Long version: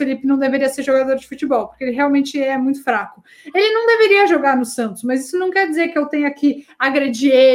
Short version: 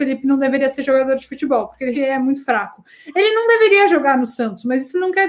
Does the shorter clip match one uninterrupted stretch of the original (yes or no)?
no